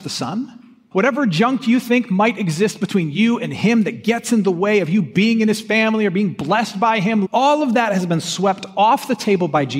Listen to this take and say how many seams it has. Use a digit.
2